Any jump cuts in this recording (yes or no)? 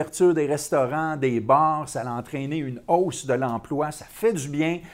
no